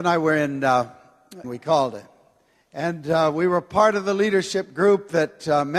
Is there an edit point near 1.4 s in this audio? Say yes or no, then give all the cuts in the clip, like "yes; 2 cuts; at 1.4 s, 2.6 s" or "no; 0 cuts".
yes; 1 cut; at 1.4 s